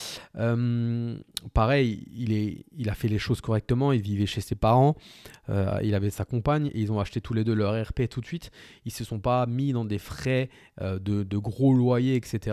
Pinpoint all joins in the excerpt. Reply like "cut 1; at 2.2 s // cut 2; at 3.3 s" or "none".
none